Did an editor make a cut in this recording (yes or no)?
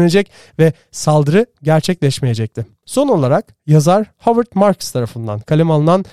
yes